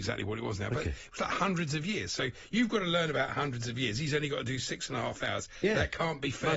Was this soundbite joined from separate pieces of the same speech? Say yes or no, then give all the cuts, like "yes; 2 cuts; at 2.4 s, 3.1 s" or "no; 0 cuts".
no; 0 cuts